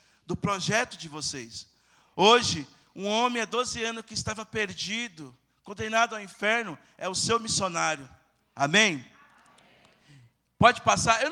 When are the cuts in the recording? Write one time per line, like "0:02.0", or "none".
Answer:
0:08.5